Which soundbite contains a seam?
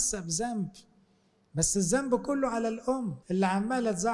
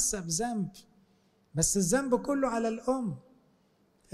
first; 1 cut; at 3.2 s

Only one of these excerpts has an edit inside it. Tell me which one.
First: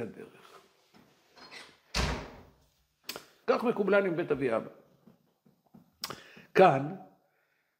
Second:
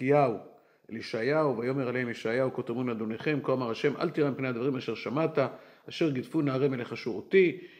first; 1 cut; at 3.4 s

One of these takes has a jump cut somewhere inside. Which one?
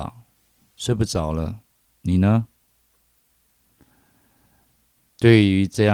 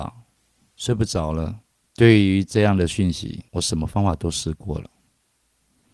second; 2 cuts; at 1.8 s, 3.5 s

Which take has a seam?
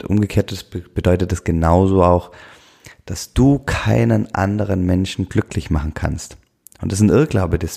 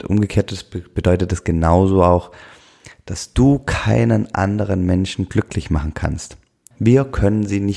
second; 1 cut; at 6.7 s

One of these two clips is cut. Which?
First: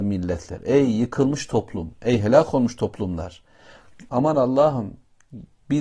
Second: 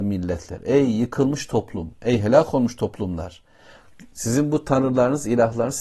first; 1 cut; at 4.1 s

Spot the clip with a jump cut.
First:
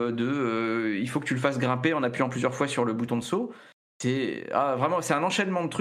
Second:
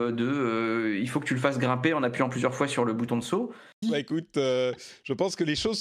second; 1 cut; at 3.8 s

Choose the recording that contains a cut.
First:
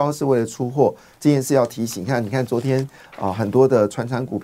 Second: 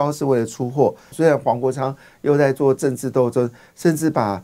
second; 1 cut; at 1.1 s

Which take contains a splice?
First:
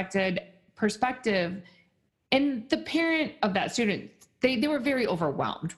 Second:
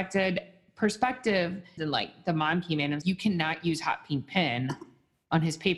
second; 2 cuts; at 1.8 s, 3.0 s

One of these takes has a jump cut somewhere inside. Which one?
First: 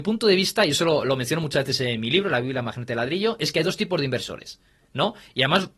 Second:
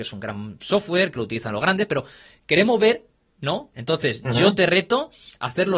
second; 1 cut; at 3.7 s

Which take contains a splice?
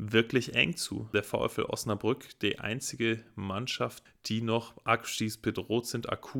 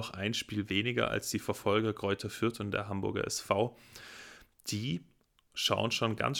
first; 1 cut; at 4.1 s

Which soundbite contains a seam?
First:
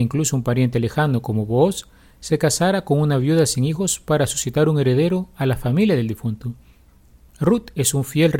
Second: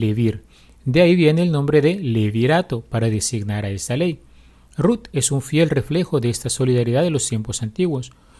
first; 1 cut; at 7.3 s

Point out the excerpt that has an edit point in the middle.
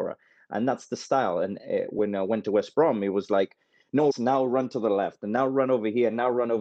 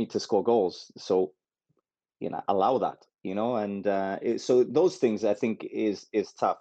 first; 1 cut; at 4.1 s

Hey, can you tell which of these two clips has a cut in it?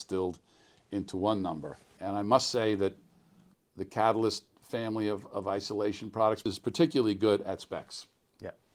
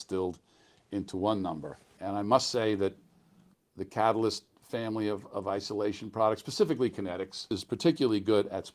first; 1 cut; at 6.4 s

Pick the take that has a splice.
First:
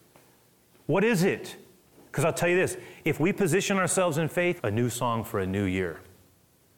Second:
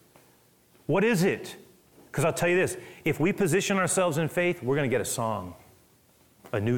first; 1 cut; at 4.6 s

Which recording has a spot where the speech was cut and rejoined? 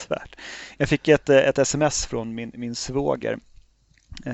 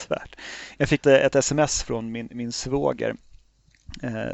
second; 1 cut; at 1.0 s

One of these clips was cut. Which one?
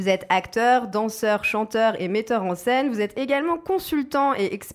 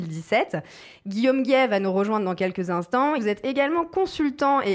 second; 1 cut; at 3.2 s

